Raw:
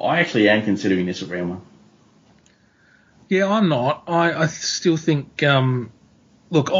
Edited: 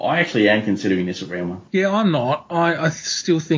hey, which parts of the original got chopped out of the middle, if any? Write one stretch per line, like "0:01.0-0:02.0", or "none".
0:01.7-0:03.2